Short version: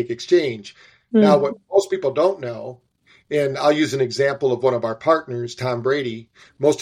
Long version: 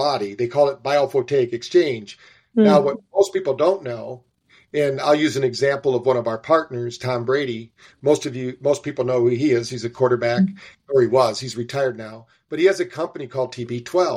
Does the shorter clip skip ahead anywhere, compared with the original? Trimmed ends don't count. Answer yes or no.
no